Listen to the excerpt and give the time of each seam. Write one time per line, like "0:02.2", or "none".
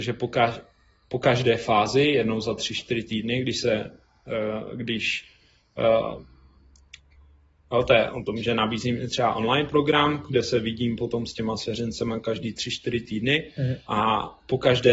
0:13.8